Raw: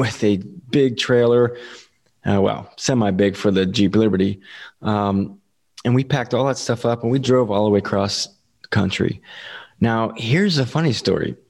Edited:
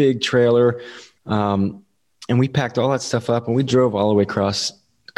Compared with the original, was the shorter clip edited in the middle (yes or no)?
yes